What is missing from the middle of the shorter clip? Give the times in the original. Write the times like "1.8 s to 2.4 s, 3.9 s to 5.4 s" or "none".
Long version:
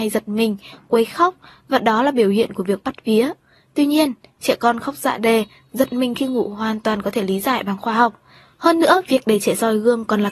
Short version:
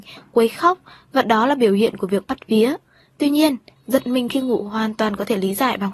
4.3 s to 5.6 s

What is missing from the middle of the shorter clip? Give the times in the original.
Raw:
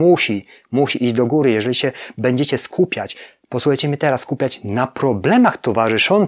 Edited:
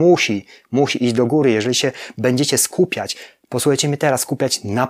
none

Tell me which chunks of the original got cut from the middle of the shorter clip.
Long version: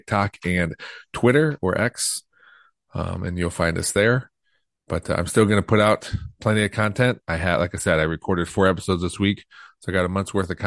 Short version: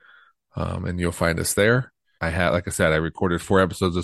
4.5 s to 7.2 s

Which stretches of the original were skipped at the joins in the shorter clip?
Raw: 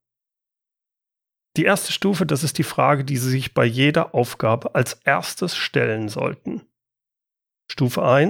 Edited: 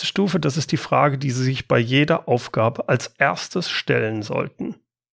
none

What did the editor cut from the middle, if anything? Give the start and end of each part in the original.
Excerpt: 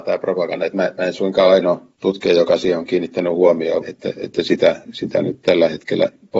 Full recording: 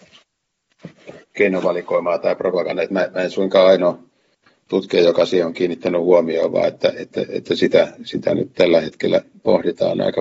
4.1 s to 4.6 s, 6.5 s to 6.9 s

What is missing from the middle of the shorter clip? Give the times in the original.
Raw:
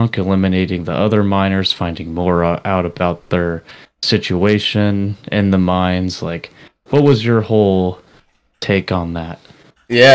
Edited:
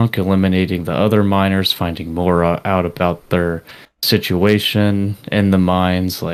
none

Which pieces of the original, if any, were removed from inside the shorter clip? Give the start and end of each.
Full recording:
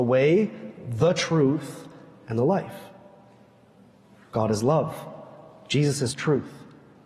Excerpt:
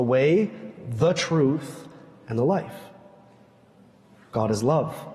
none

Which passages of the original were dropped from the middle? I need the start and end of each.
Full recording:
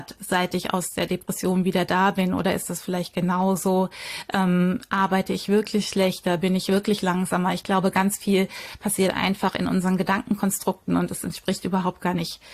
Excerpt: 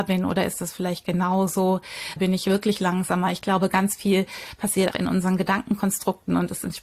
4.2 s to 6.4 s, 9.1 s to 9.5 s

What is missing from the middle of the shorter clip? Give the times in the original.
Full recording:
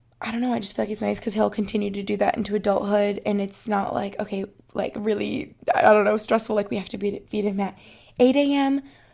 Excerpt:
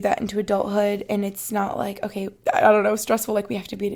4.6 s to 5.6 s

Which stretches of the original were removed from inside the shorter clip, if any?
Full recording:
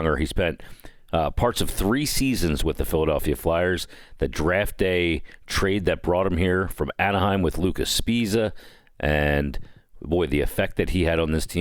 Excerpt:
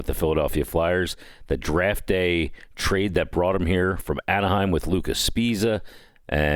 none

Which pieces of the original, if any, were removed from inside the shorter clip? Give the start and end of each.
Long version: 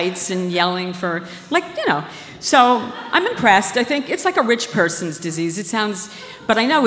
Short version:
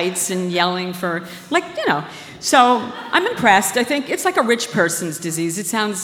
none

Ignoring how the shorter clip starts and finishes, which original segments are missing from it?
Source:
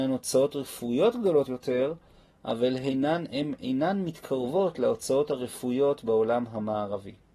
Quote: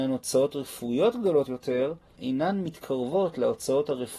2.2 s to 3.6 s

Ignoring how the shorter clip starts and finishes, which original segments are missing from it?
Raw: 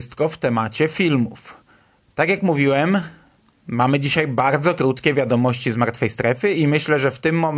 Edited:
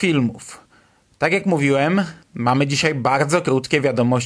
3.2 s to 3.6 s

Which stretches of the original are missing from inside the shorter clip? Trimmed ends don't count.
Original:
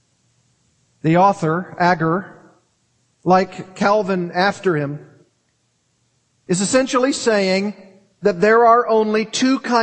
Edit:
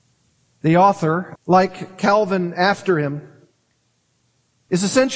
1.8 s to 3.1 s

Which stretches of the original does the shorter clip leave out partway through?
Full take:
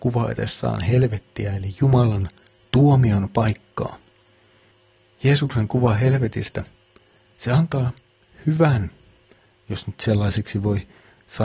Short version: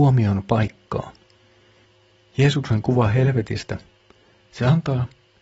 none

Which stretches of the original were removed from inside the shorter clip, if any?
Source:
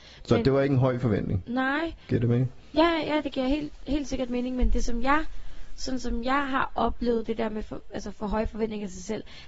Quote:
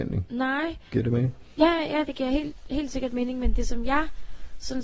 none

